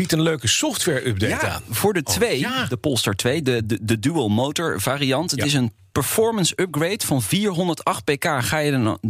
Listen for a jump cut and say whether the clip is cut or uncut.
uncut